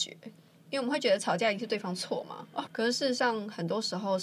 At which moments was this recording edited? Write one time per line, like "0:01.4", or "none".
0:02.7